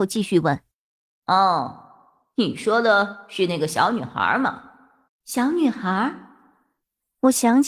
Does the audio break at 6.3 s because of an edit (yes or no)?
no